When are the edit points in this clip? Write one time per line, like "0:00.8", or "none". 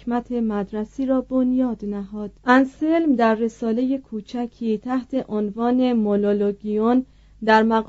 0:02.4